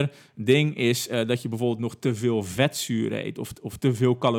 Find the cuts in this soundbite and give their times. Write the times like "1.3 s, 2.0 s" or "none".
none